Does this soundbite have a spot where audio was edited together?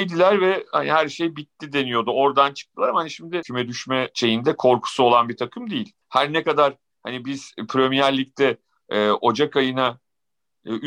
yes; 1 cut; at 6.0 s

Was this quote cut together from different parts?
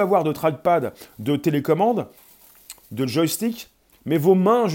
no; 0 cuts

